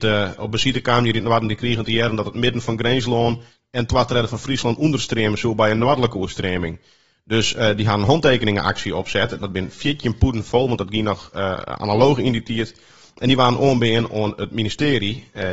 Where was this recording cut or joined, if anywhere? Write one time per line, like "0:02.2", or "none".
0:09.4